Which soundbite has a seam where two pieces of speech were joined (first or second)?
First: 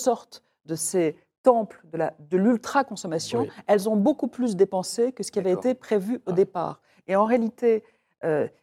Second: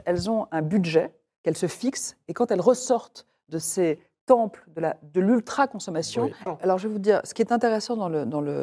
second